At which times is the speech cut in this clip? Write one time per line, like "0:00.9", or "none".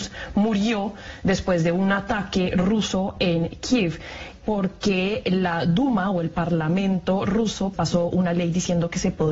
0:04.4
0:07.7